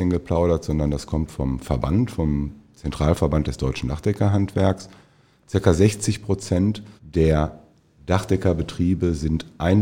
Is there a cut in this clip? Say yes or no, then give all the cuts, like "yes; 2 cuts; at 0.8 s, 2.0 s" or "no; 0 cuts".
yes; 1 cut; at 7.0 s